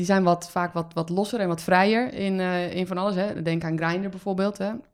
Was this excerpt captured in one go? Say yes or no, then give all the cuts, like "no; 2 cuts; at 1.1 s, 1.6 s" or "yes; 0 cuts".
yes; 0 cuts